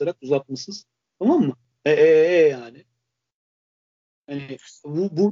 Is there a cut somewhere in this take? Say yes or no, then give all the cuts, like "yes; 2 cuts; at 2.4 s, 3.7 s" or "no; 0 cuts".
no; 0 cuts